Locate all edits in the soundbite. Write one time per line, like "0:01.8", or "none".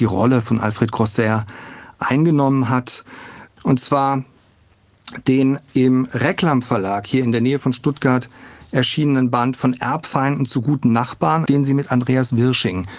0:03.6
0:11.5